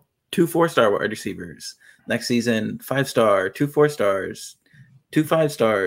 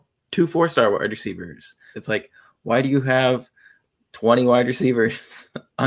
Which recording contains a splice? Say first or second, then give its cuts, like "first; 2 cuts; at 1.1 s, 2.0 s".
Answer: second; 1 cut; at 1.9 s